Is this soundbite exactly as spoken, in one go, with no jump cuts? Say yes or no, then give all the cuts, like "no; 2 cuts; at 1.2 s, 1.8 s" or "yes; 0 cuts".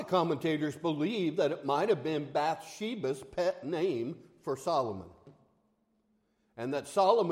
yes; 0 cuts